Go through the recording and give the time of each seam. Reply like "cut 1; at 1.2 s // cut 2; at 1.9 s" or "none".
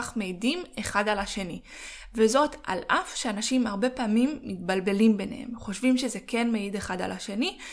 none